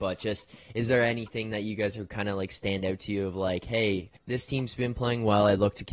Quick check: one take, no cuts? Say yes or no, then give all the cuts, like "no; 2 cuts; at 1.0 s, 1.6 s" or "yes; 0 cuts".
no; 1 cut; at 4.2 s